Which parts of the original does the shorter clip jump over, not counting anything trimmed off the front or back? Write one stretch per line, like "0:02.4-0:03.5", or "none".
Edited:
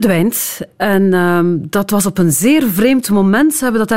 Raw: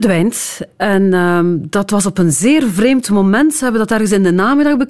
none